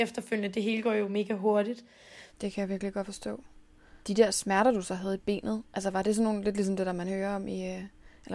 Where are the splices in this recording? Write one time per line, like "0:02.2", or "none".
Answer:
0:02.3
0:04.0